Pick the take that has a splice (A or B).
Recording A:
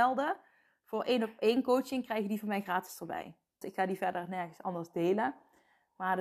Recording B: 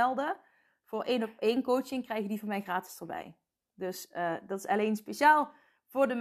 A